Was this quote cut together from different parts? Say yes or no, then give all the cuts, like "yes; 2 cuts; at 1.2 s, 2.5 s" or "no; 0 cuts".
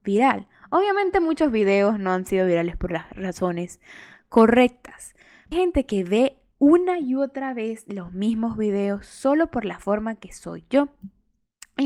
yes; 1 cut; at 5.5 s